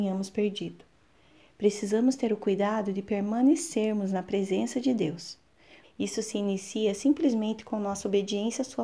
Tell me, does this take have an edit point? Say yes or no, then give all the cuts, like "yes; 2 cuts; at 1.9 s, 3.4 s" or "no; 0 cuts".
yes; 1 cut; at 5.8 s